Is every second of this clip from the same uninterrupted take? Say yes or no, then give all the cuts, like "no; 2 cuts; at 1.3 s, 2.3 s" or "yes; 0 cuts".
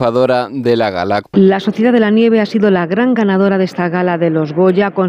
no; 1 cut; at 1.2 s